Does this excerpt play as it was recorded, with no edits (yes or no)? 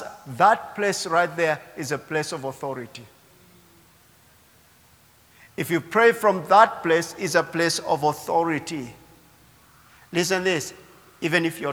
yes